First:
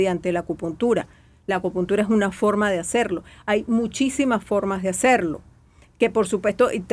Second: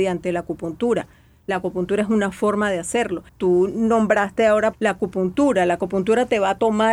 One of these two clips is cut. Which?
second; 2 cuts; at 3.3 s, 4.7 s

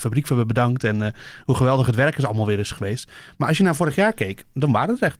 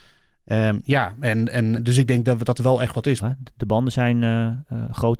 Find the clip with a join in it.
second; 2 cuts; at 1.8 s, 3.2 s

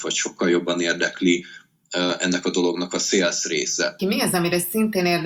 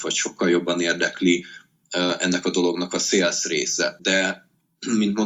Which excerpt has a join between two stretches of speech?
first; 1 cut; at 4.0 s

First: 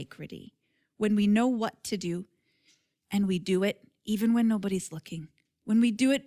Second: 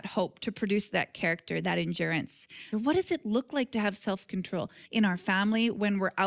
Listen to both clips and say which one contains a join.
second; 2 cuts; at 2.7 s, 4.9 s

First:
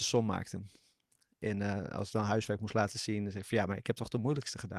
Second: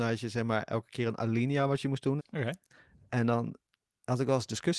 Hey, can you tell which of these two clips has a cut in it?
second; 1 cut; at 2.2 s

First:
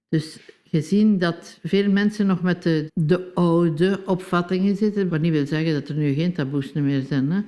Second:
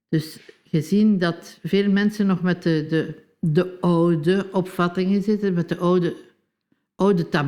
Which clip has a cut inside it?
first; 2 cuts; at 2.9 s, 5.1 s

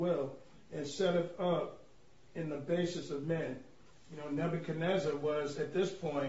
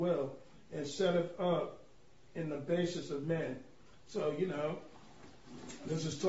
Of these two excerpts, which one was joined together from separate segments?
first; 1 cut; at 3.9 s

